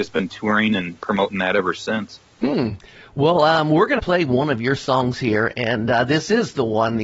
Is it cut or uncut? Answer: cut